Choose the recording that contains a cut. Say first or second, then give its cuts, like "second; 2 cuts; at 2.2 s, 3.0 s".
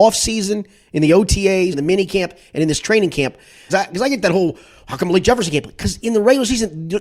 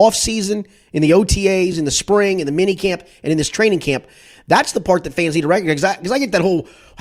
first; 2 cuts; at 1.7 s, 3.7 s